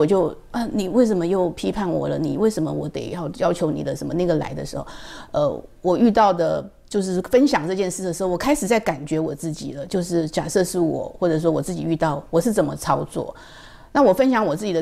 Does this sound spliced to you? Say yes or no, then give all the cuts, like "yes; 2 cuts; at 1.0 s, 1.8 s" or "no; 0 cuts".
no; 0 cuts